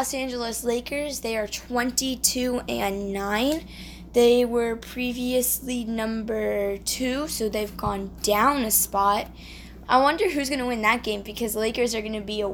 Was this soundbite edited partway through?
yes; 1 cut; at 9.8 s

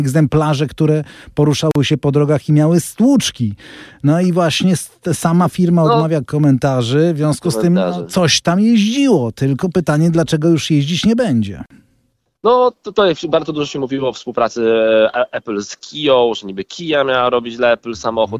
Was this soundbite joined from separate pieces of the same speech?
no; 0 cuts

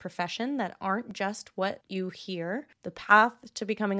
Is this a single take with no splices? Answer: no; 1 cut; at 2.8 s

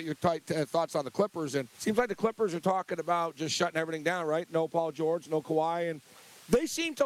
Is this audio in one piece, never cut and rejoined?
no; 1 cut; at 1.7 s

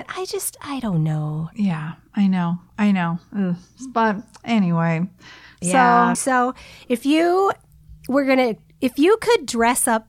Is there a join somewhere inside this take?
yes; 1 cut; at 6.1 s

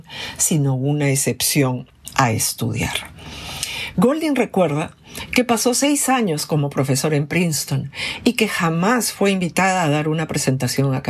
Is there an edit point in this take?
yes; 1 cut; at 3.9 s

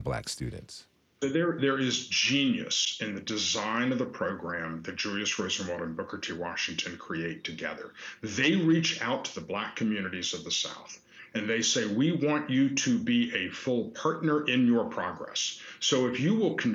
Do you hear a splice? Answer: no; 0 cuts

